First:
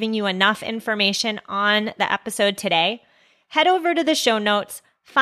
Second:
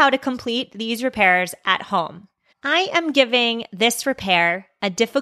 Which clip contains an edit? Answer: second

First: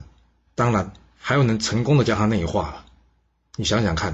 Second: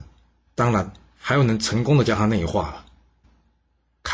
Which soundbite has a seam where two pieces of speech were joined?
second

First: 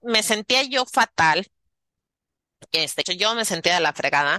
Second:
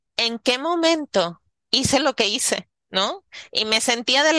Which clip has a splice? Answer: first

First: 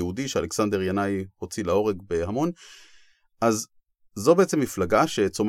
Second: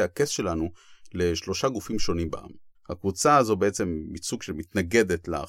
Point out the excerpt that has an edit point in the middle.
second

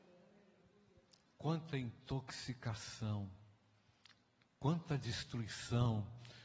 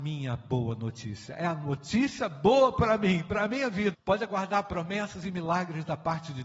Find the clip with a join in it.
second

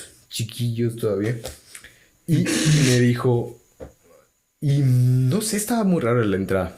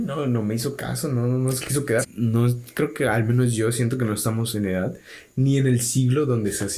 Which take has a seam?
second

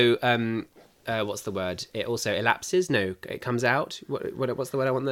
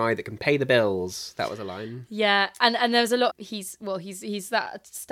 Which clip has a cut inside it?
second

